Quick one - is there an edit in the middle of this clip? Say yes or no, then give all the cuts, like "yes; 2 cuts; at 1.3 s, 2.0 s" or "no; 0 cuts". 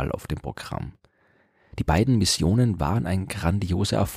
no; 0 cuts